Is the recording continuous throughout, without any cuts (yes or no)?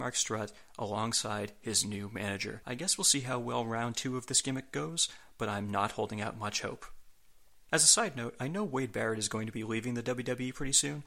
yes